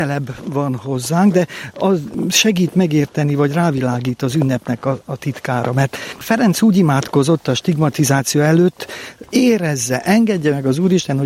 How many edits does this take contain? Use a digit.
0